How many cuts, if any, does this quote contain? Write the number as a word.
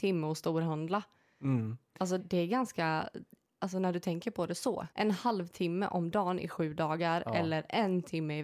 two